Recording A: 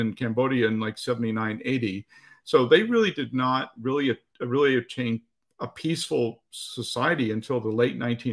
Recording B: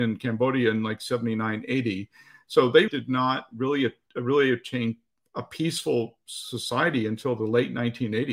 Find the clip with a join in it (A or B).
B